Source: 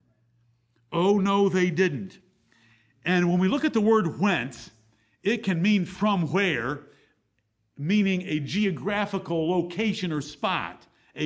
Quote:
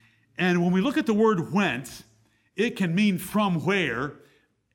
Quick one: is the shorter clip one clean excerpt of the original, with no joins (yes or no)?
yes